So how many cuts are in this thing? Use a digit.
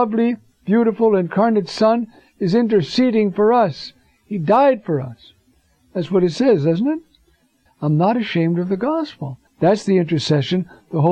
2